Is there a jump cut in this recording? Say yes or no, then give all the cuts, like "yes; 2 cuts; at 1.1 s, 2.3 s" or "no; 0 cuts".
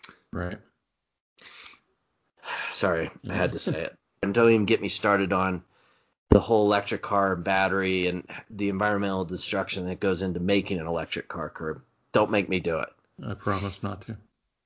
yes; 1 cut; at 4.2 s